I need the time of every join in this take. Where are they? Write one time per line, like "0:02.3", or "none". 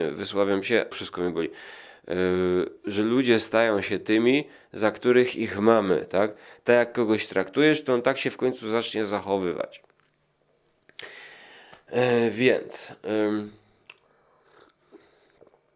0:00.9